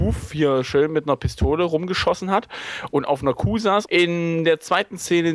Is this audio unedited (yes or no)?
no